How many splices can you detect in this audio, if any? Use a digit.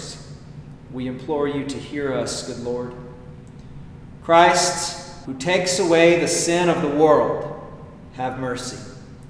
2